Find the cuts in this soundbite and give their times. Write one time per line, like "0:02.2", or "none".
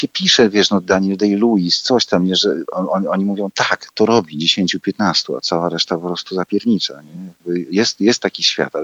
none